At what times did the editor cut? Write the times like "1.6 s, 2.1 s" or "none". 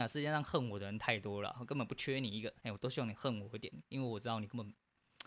2.6 s